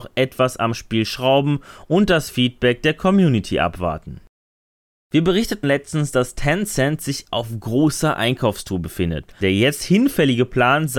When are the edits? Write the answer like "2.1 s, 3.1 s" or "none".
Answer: 5.6 s, 9.4 s